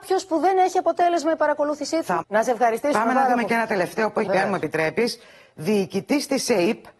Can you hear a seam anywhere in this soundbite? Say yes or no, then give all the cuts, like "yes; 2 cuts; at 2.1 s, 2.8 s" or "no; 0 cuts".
yes; 2 cuts; at 2.2 s, 4.3 s